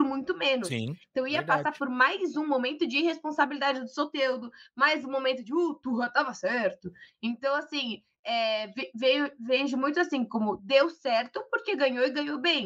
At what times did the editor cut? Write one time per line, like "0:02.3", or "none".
none